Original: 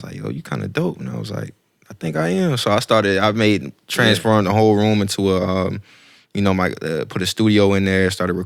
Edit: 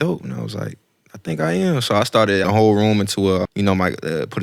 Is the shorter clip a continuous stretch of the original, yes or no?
no